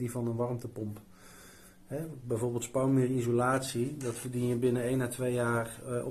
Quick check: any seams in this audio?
no; 0 cuts

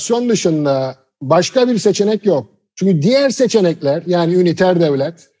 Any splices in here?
no; 0 cuts

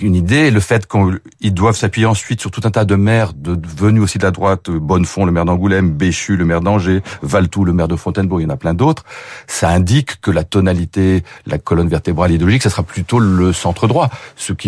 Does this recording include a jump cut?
no; 0 cuts

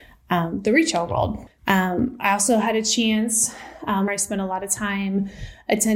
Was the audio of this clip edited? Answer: yes; 2 cuts; at 1.6 s, 4.1 s

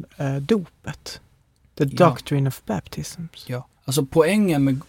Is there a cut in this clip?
yes; 1 cut; at 3.8 s

